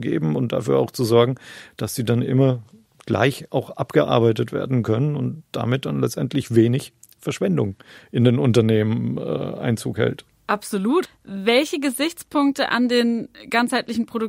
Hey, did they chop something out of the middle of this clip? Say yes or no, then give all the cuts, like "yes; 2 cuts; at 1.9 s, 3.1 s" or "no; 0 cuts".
yes; 1 cut; at 11.0 s